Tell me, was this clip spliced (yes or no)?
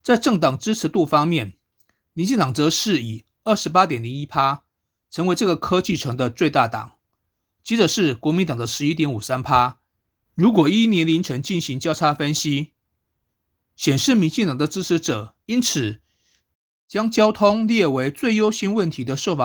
yes